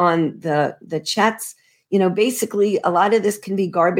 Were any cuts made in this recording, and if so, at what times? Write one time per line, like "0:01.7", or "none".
none